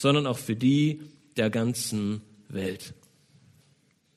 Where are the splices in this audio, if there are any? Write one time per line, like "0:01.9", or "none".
none

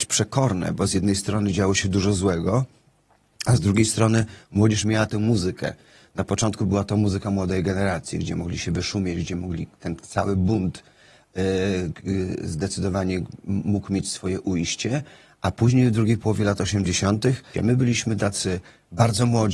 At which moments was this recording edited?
0:17.5

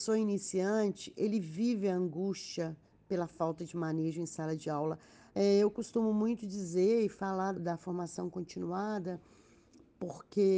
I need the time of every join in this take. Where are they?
0:05.3
0:07.5

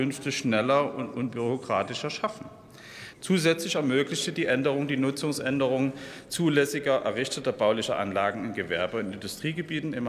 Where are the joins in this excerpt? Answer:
0:03.1

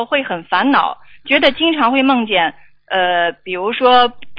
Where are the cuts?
none

